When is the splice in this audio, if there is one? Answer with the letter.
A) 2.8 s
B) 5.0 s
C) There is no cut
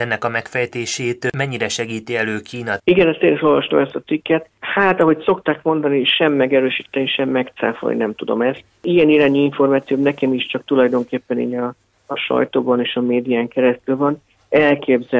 A